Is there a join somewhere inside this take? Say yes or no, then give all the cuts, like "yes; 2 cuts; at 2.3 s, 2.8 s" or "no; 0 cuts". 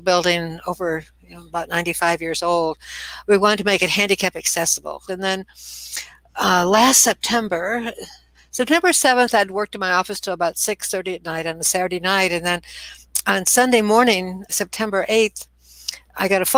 yes; 2 cuts; at 5.1 s, 14.5 s